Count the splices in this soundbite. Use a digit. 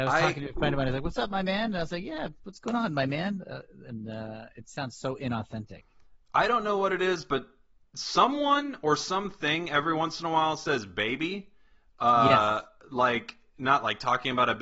0